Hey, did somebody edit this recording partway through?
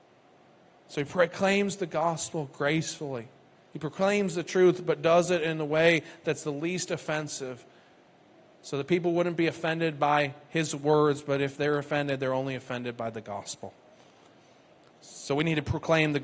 no; 0 cuts

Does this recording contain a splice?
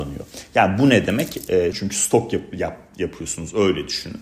yes; 1 cut; at 1.7 s

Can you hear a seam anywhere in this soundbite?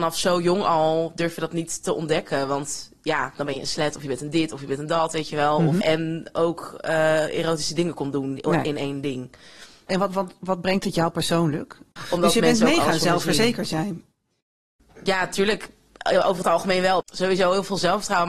yes; 3 cuts; at 5.8 s, 12.0 s, 17.0 s

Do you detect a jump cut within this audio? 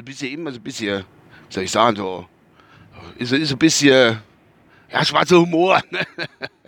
no; 0 cuts

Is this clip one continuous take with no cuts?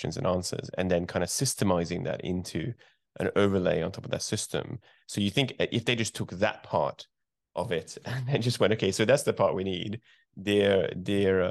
yes; 0 cuts

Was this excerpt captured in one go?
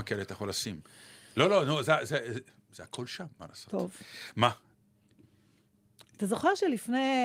yes; 0 cuts

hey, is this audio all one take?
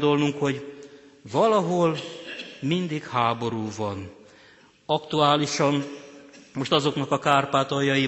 yes; 0 cuts

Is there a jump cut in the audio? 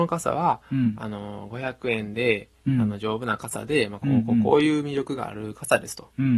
no; 0 cuts

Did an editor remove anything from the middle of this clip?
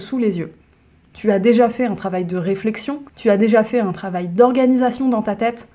yes; 2 cuts; at 1.0 s, 3.1 s

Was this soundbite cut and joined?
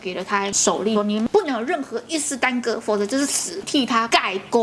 yes; 2 cuts; at 0.9 s, 3.6 s

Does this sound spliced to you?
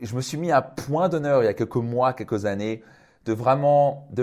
no; 0 cuts

